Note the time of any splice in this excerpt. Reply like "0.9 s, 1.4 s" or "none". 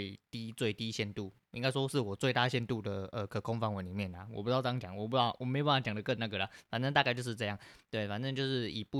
none